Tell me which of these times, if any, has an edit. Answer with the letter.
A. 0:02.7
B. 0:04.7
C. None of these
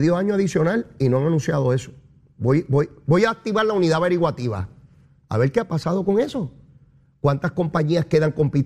C